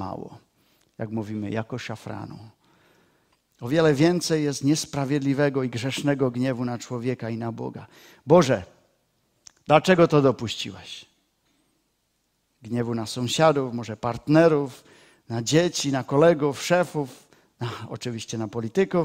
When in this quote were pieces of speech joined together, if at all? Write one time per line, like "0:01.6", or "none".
none